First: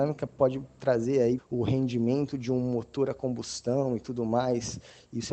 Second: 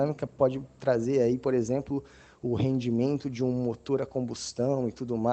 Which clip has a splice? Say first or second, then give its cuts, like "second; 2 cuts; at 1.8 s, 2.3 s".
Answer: first; 1 cut; at 1.4 s